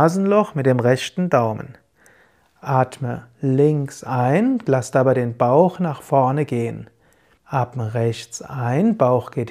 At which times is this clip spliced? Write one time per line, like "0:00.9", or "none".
0:07.4